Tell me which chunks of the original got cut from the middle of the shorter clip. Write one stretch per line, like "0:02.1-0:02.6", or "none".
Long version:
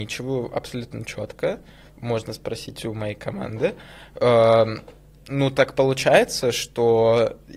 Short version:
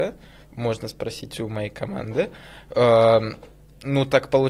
none